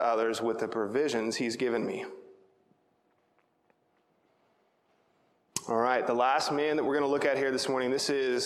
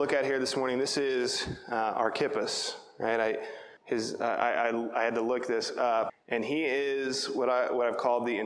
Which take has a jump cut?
second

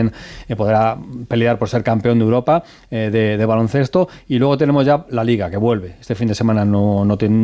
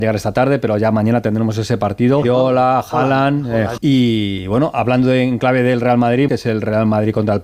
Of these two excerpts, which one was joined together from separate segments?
second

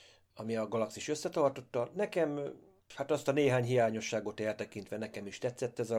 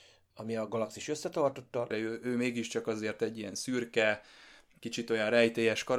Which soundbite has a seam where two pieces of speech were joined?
second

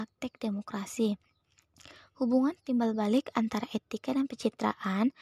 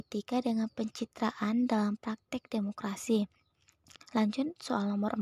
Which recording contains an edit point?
second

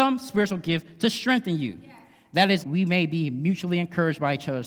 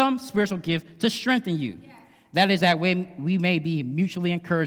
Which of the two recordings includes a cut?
first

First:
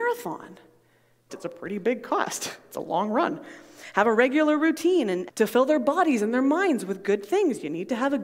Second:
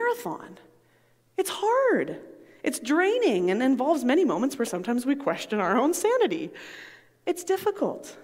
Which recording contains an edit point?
first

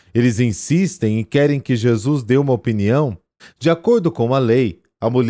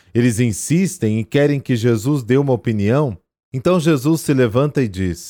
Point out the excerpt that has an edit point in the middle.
first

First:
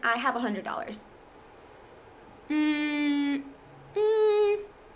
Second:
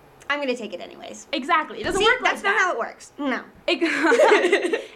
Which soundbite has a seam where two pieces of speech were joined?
second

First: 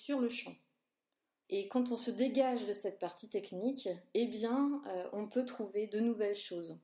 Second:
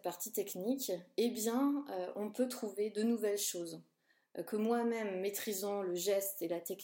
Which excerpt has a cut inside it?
first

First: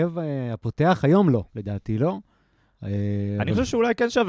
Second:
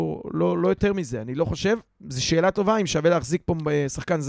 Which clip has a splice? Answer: first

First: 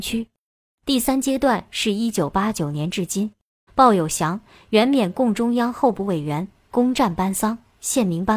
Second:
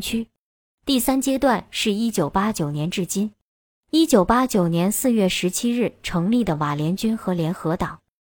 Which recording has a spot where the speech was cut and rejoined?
first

